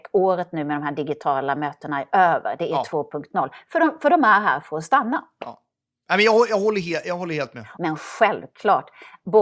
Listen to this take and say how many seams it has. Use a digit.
1